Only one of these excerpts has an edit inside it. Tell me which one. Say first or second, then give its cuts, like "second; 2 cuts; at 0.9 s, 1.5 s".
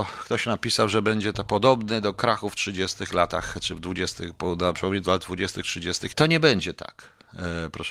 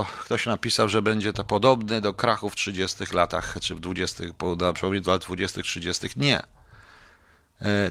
first; 1 cut; at 6.1 s